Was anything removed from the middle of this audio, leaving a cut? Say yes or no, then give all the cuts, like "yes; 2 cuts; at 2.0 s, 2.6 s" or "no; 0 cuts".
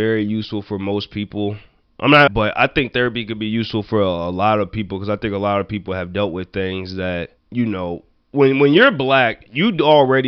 yes; 2 cuts; at 2.3 s, 7.4 s